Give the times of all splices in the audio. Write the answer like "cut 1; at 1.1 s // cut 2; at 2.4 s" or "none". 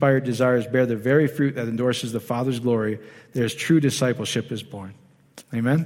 none